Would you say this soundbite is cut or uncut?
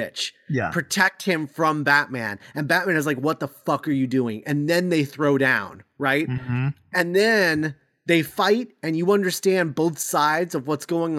uncut